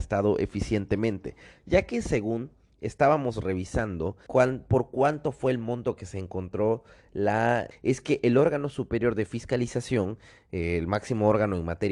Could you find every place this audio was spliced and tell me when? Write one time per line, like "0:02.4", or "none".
0:04.3
0:07.7